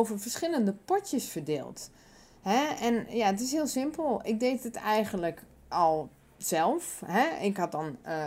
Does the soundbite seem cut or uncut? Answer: uncut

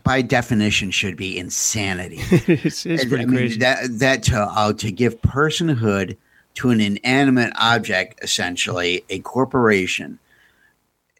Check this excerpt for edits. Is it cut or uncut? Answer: uncut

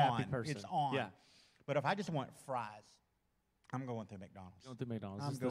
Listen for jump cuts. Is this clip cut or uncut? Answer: uncut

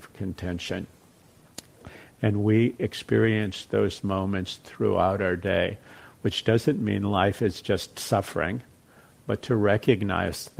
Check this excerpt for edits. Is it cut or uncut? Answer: uncut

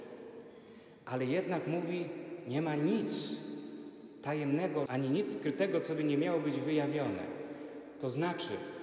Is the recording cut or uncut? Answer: cut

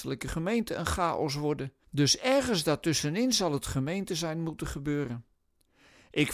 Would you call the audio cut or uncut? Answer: cut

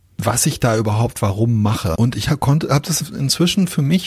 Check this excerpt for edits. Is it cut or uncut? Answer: cut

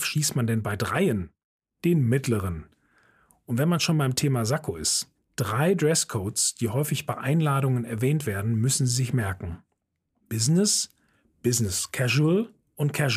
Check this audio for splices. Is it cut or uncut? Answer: uncut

